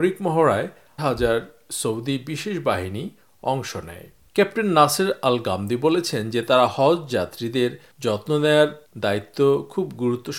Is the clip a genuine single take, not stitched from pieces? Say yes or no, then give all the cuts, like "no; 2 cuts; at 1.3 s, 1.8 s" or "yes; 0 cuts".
no; 1 cut; at 1.0 s